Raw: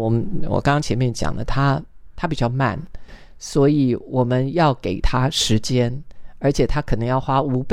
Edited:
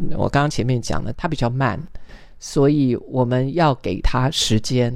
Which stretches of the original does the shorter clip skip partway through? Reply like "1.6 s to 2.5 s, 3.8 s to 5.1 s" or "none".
1.4 s to 2.1 s